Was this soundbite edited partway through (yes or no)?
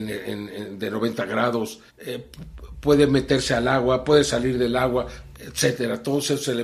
yes